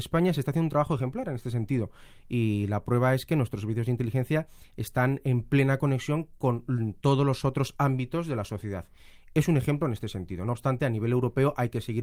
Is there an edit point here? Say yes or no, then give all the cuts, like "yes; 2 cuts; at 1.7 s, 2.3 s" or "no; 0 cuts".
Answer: no; 0 cuts